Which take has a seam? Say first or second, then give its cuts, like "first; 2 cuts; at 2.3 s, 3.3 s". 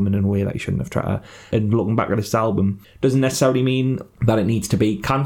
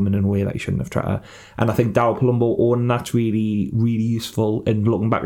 first; 1 cut; at 1.5 s